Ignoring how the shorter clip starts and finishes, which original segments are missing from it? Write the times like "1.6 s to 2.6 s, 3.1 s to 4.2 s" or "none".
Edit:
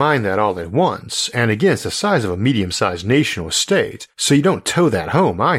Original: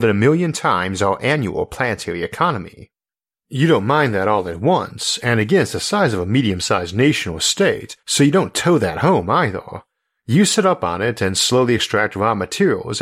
none